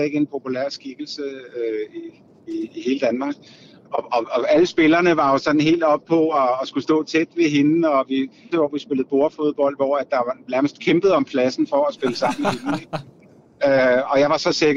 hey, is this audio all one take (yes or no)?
no